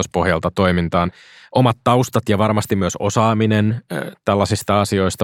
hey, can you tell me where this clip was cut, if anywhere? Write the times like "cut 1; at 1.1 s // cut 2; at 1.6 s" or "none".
none